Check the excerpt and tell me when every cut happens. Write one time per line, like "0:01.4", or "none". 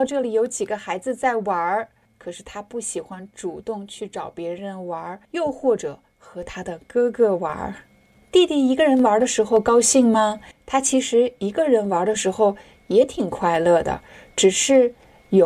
0:05.3